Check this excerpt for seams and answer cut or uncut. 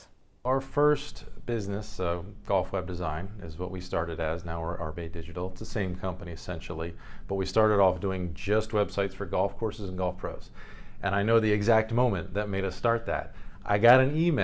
uncut